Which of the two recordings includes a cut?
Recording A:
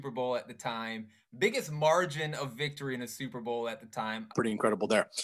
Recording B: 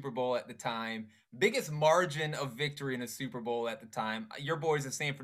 A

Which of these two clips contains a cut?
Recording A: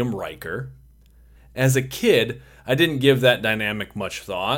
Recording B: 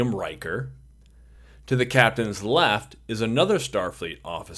A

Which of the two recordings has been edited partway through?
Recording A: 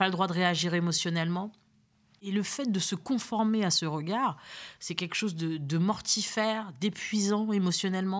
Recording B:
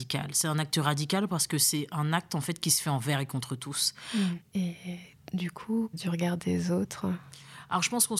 B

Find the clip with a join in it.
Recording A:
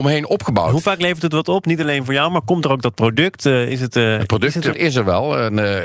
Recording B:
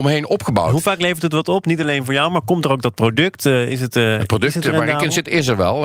A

